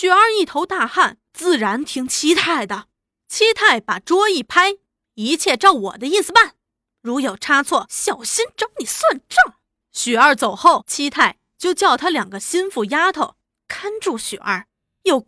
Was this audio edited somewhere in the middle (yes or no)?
no